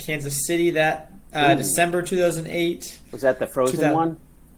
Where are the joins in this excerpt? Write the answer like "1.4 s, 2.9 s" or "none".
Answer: none

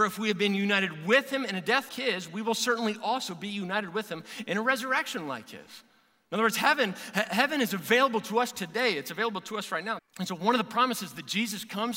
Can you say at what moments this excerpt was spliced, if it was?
1.9 s, 10.0 s

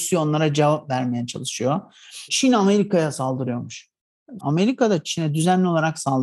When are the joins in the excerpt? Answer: 2.3 s, 4.4 s

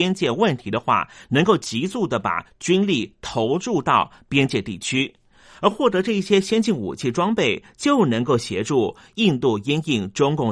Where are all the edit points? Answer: none

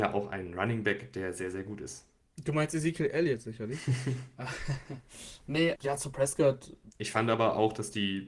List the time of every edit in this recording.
5.8 s, 6.9 s

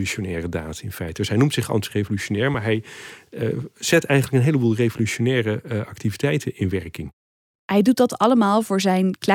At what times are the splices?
none

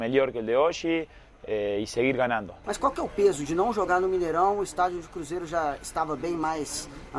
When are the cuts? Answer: 2.6 s

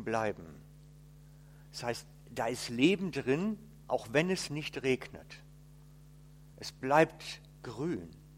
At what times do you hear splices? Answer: none

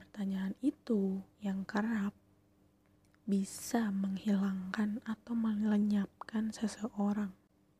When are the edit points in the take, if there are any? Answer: 1.3 s

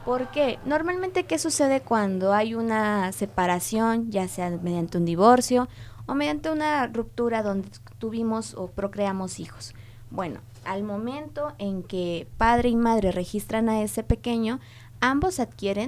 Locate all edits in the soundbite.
none

